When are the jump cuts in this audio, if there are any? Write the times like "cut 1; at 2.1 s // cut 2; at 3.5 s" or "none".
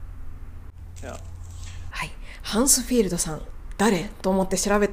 cut 1; at 1.9 s